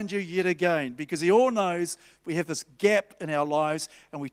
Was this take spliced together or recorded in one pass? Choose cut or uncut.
uncut